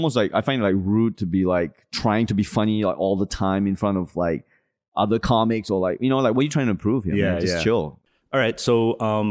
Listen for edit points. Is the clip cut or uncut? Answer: uncut